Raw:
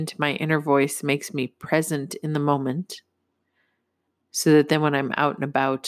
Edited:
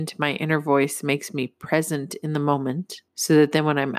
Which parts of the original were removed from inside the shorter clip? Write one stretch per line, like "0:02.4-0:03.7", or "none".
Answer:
0:03.1-0:04.2